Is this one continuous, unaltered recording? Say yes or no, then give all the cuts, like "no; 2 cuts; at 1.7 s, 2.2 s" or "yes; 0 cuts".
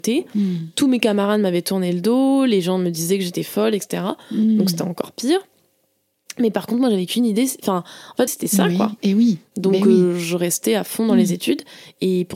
no; 1 cut; at 8.3 s